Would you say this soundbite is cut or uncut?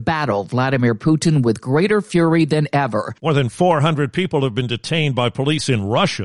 cut